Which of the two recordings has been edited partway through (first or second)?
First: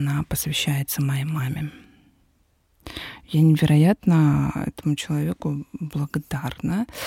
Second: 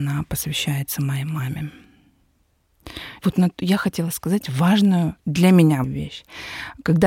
second